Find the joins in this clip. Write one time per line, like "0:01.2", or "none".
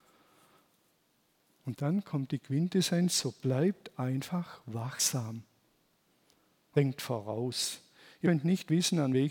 none